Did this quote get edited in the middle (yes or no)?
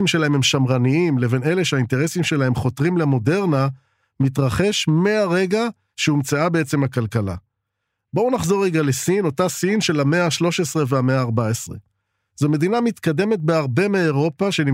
no